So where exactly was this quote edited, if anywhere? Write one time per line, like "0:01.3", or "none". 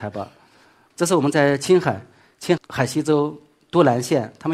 0:00.9
0:02.6